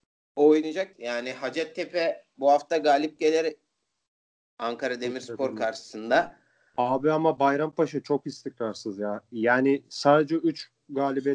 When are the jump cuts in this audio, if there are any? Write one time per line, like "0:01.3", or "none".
0:00.9